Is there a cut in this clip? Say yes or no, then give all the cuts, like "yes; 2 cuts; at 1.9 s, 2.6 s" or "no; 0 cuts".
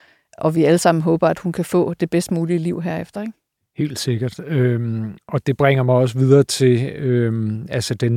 no; 0 cuts